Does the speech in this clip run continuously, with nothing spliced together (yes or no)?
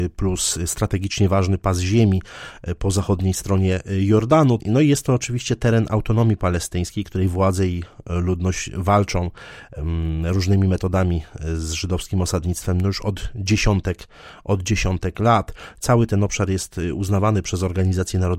no